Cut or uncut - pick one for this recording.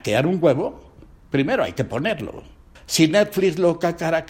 cut